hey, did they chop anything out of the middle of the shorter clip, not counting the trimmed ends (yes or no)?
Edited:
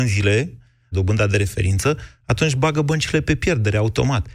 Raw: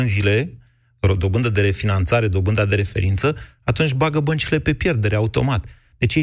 yes